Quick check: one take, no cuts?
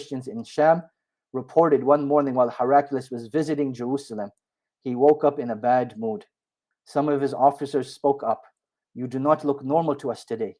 yes; 0 cuts

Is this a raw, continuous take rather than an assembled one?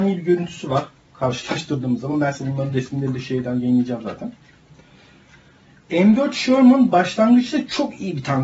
yes; 0 cuts

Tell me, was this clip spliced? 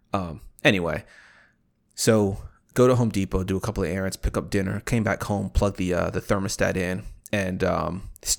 no; 0 cuts

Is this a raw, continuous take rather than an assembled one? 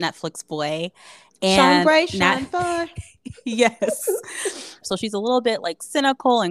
no; 1 cut; at 4.8 s

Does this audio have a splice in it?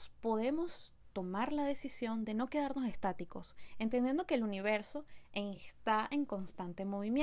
no; 0 cuts

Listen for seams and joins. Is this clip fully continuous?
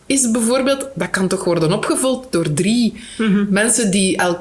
yes; 0 cuts

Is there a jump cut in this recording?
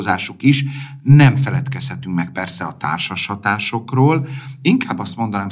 no; 0 cuts

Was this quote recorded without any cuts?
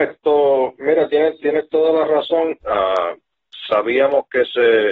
no; 1 cut; at 2.6 s

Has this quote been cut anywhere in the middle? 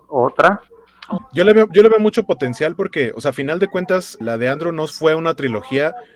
yes; 2 cuts; at 1.2 s, 4.2 s

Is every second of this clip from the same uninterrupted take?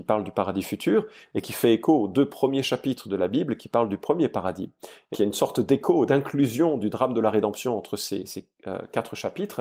no; 1 cut; at 5.1 s

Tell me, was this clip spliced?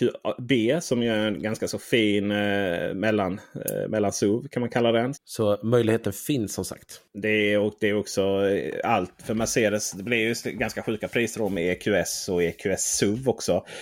yes; 1 cut; at 5.1 s

